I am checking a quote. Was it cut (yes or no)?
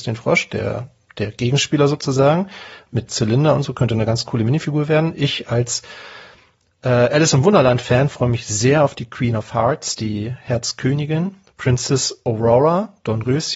no